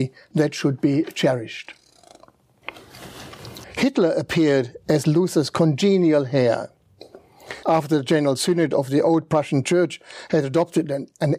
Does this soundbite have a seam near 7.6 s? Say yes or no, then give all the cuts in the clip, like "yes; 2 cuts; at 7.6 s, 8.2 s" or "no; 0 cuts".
yes; 2 cuts; at 3.6 s, 7.6 s